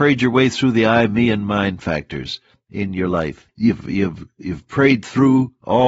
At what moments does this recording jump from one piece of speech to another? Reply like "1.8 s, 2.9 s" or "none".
3.5 s